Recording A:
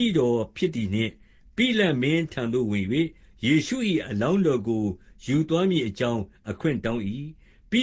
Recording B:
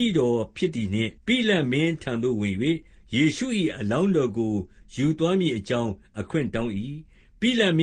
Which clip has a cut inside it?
B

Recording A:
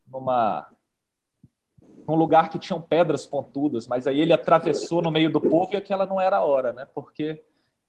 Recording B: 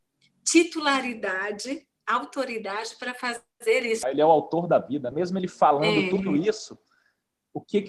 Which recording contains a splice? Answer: B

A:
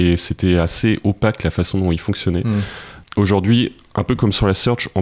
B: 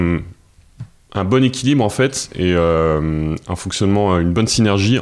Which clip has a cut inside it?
A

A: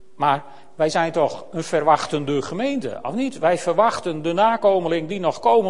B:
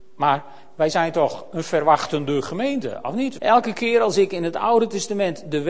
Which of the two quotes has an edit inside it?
B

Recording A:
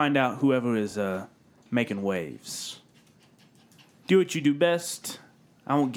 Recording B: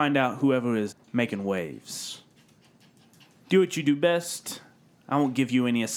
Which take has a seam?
B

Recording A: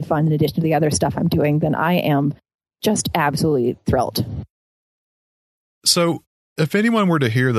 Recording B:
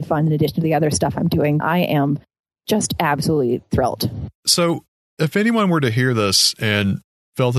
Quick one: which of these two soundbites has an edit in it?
B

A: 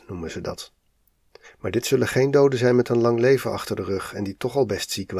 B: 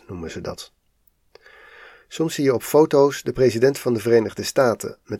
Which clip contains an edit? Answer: A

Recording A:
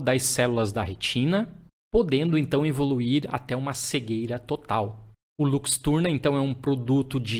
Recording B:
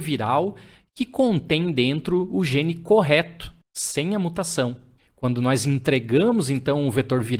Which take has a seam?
B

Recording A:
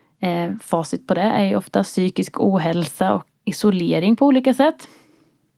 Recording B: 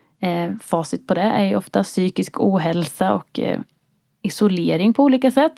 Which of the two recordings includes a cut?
A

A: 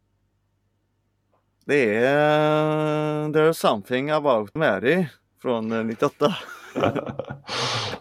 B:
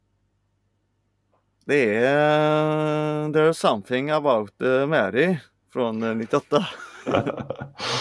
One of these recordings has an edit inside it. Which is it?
A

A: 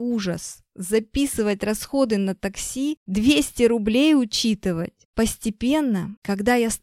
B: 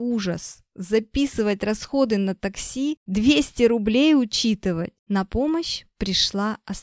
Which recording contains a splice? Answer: B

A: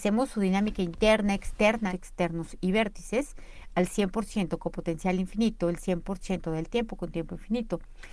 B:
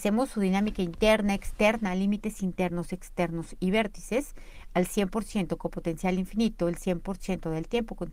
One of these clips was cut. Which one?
A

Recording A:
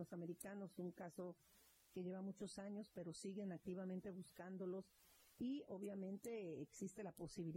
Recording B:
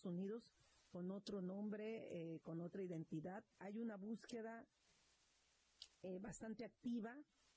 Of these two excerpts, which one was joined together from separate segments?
B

